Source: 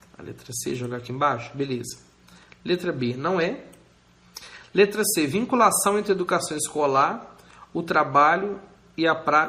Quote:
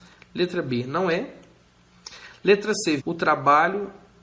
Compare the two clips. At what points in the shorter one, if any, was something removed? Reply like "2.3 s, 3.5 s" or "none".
3.0 s